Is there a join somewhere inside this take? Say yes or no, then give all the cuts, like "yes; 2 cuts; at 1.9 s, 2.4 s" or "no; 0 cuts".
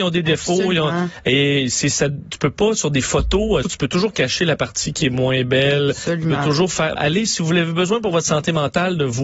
yes; 2 cuts; at 3.6 s, 7.0 s